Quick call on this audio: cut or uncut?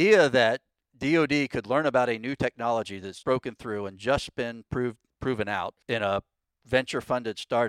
cut